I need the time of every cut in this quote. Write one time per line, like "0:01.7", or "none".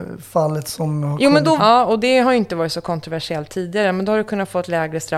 0:01.6